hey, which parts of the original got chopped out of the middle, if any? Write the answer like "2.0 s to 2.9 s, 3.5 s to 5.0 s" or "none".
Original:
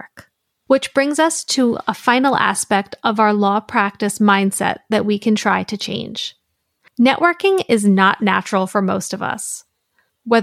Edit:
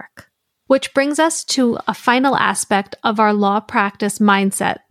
none